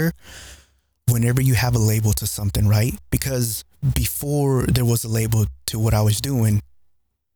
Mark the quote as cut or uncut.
uncut